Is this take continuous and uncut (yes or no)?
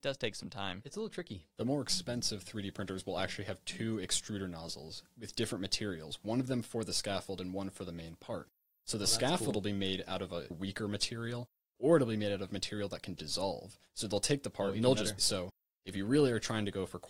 no